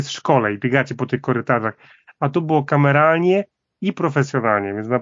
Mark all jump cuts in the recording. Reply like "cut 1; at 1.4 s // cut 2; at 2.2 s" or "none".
none